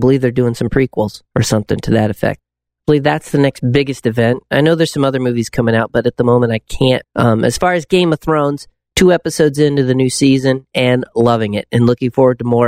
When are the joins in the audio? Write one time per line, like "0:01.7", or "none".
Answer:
0:01.3
0:02.4
0:07.0